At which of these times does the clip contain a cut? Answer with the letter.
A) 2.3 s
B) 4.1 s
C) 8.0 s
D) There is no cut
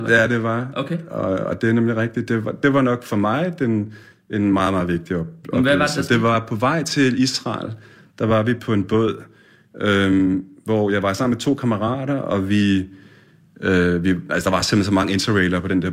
D